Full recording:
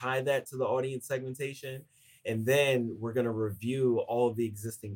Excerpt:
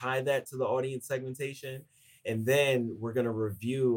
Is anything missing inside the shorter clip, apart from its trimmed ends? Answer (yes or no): no